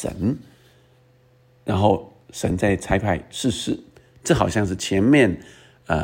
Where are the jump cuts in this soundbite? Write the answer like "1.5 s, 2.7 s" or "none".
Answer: none